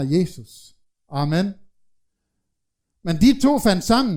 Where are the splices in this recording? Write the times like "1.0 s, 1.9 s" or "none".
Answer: none

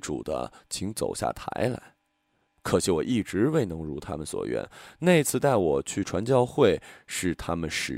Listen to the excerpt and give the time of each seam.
2.5 s

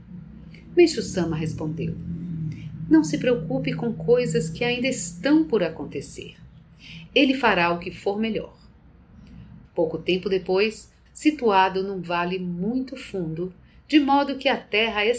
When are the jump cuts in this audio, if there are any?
7.1 s, 9.6 s, 11.1 s

